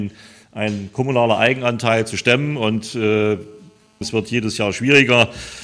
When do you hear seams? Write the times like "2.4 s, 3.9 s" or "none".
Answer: 4.0 s